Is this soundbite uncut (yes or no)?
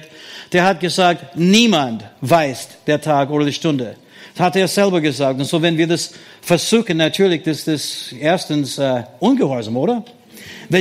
yes